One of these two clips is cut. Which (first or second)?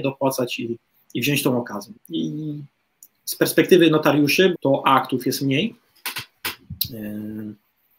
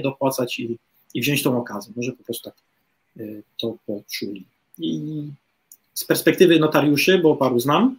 first